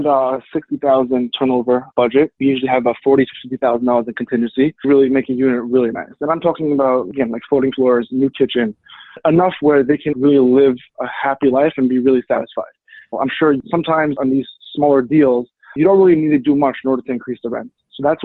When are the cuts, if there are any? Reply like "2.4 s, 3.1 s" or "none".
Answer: 4.8 s, 10.1 s, 13.1 s

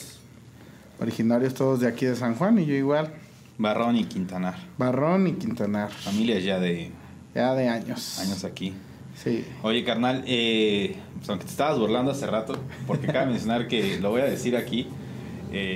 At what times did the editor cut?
none

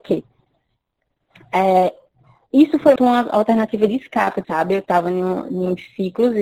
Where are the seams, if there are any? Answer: 3.0 s, 4.4 s

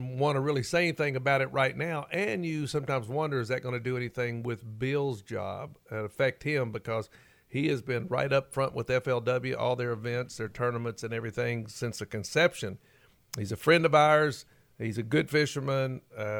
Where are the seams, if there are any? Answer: none

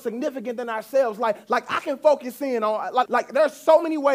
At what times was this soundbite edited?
3.0 s

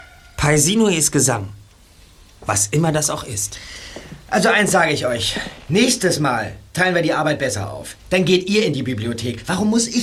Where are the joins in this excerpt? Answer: none

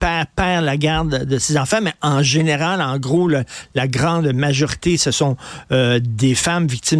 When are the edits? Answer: none

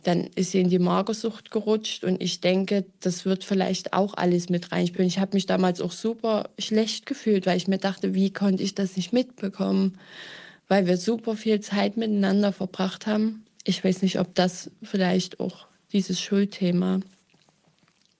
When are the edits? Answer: none

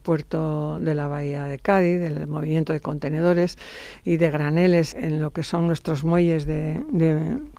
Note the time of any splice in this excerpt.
4.9 s

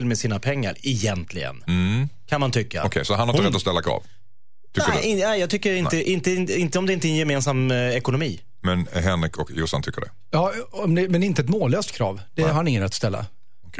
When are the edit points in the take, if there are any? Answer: none

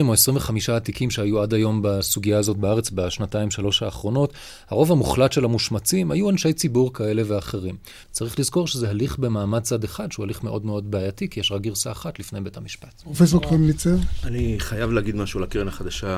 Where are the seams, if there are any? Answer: 8.0 s

